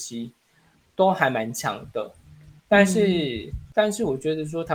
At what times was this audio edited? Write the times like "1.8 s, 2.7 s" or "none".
2.6 s